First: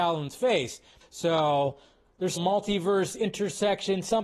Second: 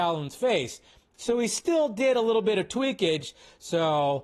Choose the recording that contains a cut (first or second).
first